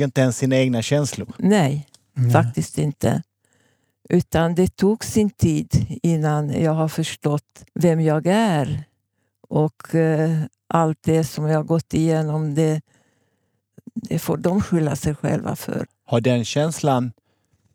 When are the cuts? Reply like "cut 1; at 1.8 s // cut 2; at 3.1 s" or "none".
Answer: cut 1; at 7.7 s // cut 2; at 15.8 s